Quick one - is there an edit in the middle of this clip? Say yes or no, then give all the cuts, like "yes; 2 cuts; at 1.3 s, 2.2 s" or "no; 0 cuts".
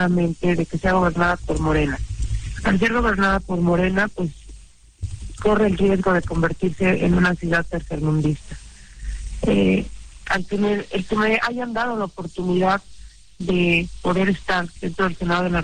no; 0 cuts